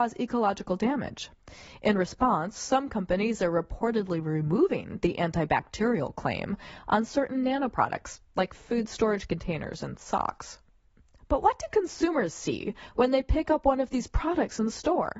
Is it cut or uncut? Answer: uncut